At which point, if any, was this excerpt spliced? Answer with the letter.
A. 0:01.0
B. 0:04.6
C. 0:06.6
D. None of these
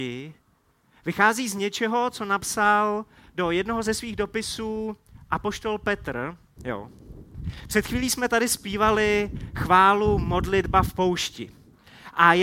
C